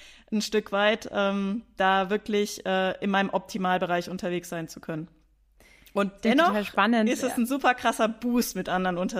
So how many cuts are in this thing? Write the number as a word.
zero